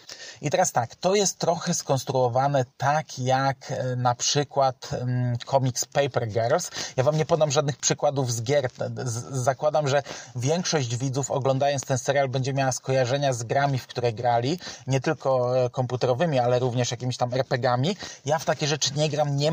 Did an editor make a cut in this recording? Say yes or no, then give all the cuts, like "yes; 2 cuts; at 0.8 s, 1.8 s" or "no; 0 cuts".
yes; 1 cut; at 2.7 s